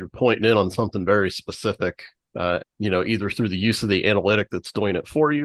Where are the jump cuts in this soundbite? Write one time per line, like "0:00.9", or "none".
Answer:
0:02.6

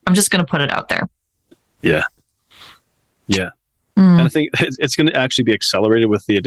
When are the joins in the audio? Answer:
0:03.9

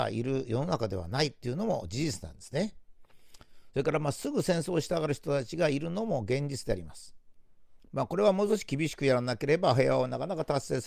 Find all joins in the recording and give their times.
0:03.7
0:07.8

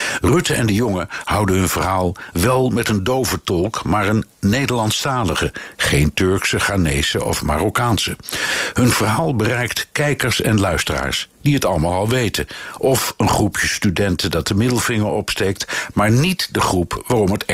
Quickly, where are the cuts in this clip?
none

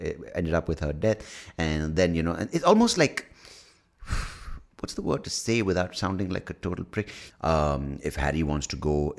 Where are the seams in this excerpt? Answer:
0:07.3

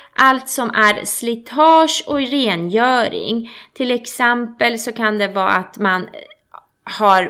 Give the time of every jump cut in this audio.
none

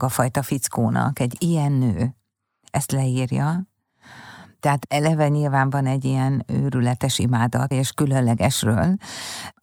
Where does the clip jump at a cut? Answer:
0:07.7

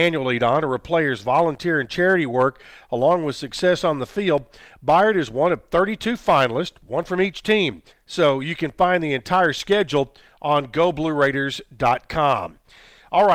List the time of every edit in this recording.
0:07.9

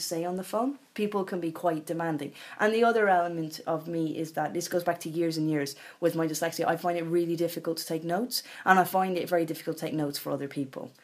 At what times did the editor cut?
none

